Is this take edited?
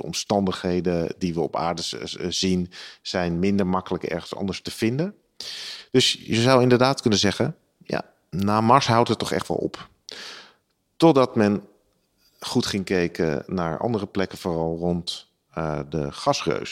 no; 0 cuts

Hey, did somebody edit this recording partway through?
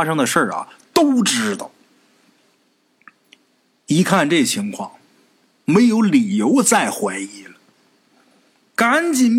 no; 0 cuts

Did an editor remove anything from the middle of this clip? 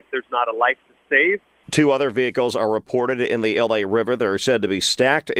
yes; 1 cut; at 1.6 s

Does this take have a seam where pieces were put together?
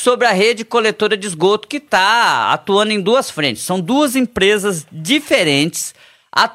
no; 0 cuts

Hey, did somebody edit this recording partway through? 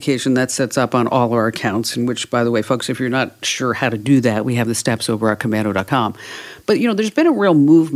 no; 0 cuts

